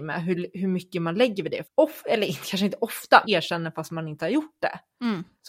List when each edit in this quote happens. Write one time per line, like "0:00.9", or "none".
0:01.6
0:03.2

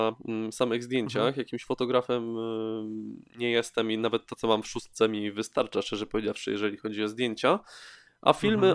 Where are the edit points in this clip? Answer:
none

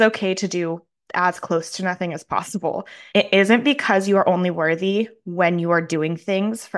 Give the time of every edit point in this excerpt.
0:03.1

